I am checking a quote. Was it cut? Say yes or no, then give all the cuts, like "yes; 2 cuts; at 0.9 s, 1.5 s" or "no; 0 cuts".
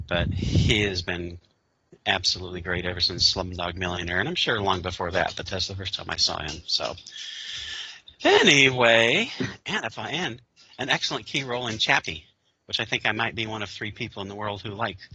no; 0 cuts